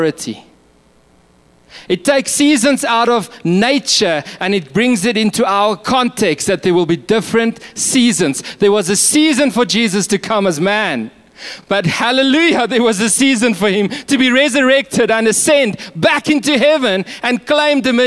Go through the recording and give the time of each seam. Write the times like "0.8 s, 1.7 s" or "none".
none

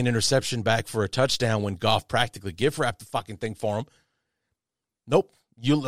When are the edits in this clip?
none

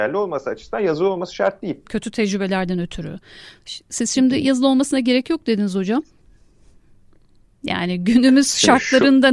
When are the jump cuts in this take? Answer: 1.8 s

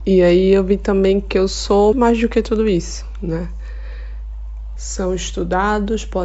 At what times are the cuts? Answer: 1.9 s, 4.8 s

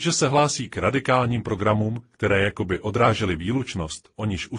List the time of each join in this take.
none

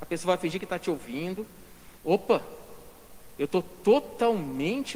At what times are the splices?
2.0 s

